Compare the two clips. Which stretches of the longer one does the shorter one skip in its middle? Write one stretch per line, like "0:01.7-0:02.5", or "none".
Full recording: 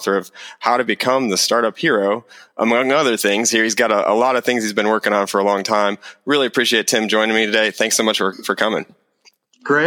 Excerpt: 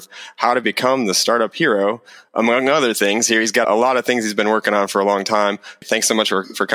0:03.9-0:04.0
0:06.2-0:07.7